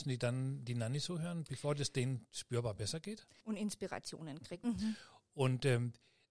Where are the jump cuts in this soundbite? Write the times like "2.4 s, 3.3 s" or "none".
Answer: 3.4 s, 4.6 s